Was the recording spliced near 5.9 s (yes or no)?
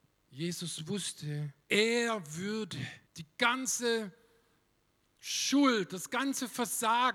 no